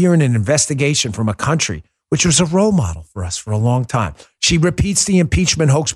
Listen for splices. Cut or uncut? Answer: uncut